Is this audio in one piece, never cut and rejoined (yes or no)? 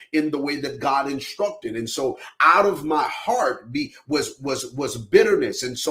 yes